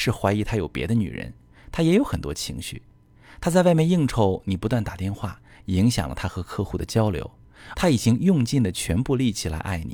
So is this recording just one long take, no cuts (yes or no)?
no